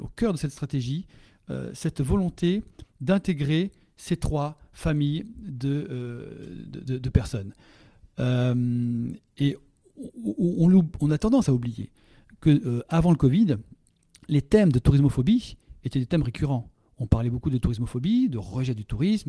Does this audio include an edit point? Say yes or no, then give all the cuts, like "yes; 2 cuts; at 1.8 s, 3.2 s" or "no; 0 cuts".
yes; 1 cut; at 8.1 s